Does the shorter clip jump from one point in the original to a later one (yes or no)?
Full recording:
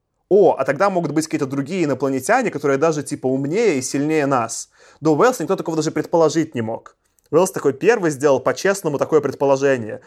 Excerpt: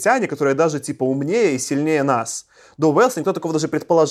no